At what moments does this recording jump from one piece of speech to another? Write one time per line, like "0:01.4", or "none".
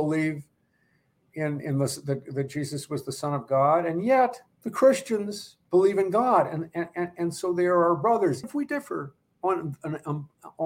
0:04.5
0:08.4